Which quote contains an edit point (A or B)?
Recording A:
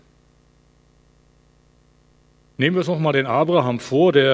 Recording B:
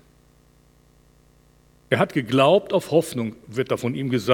B